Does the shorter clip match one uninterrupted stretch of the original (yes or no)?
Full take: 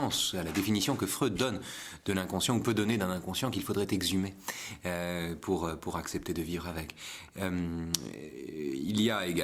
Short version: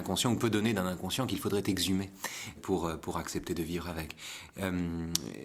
no